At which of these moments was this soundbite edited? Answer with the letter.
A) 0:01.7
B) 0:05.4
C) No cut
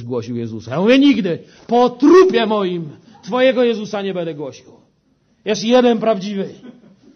C